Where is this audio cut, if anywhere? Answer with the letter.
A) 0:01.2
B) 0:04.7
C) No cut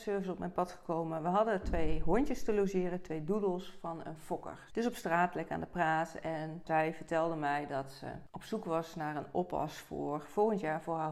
B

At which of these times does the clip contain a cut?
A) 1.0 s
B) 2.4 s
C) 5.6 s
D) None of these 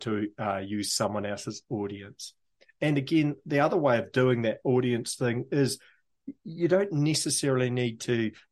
D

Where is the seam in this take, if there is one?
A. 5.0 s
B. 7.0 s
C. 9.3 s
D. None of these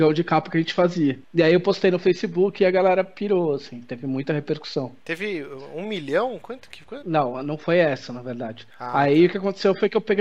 B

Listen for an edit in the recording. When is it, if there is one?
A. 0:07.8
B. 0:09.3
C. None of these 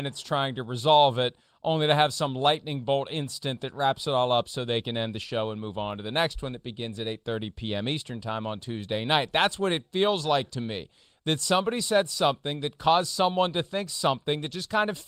C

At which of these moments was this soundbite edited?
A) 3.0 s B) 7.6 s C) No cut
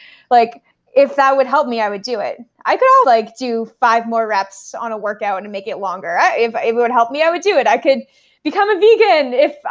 A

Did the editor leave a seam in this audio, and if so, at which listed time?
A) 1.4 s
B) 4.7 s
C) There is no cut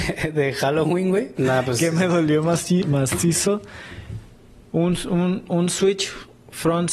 A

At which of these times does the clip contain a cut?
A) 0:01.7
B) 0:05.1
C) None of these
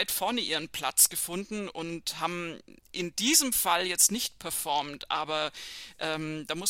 C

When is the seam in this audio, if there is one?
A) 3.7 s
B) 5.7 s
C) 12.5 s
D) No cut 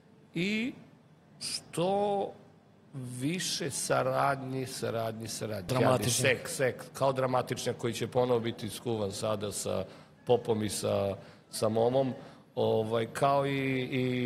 B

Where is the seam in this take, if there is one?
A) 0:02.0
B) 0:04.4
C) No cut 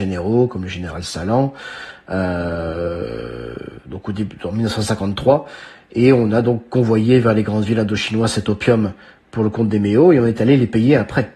C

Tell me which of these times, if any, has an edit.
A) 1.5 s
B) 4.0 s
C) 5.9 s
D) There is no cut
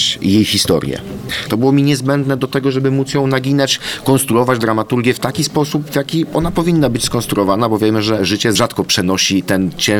A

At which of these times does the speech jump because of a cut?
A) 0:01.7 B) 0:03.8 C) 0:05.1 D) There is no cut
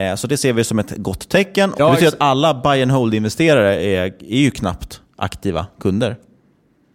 A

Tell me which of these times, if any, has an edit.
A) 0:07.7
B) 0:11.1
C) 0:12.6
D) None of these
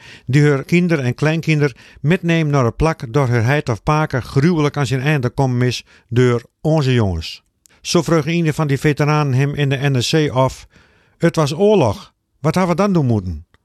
A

